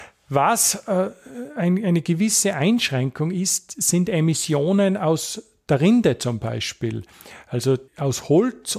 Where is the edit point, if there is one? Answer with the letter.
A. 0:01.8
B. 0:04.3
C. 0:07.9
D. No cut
C